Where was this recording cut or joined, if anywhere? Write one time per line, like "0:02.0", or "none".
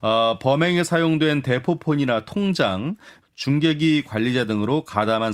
0:03.2